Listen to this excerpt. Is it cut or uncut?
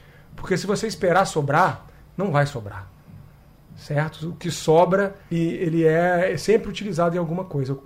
cut